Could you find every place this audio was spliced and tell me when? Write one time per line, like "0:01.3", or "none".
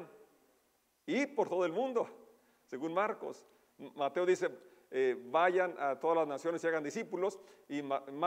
none

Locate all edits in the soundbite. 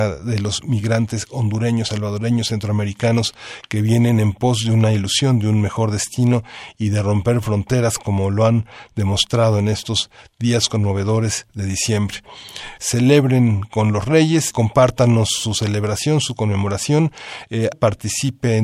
0:12.8
0:14.5
0:17.7

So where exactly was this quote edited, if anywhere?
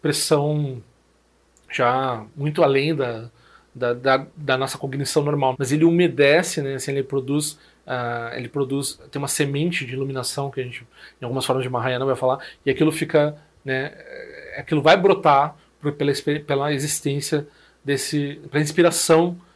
0:05.5

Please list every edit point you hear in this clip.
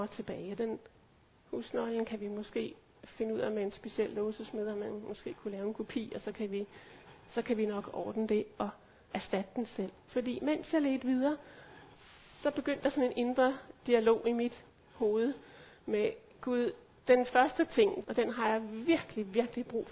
0:10.1
0:18.0

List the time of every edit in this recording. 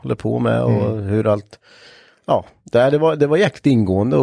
none

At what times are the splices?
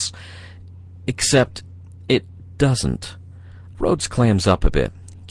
0:03.7

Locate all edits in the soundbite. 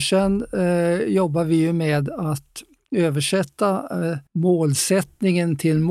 0:04.3

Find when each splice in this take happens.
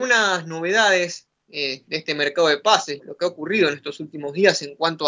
0:03.0

